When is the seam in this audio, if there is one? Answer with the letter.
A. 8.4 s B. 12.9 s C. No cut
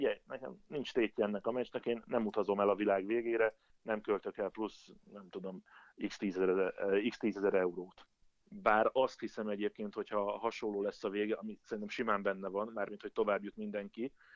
A